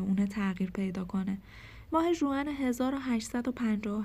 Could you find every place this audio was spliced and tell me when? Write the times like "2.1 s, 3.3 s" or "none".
1.9 s